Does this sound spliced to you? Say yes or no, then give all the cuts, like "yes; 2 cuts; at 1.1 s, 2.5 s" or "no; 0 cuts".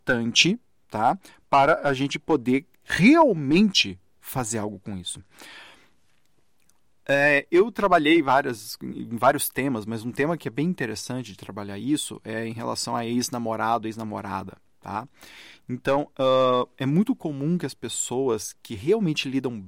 no; 0 cuts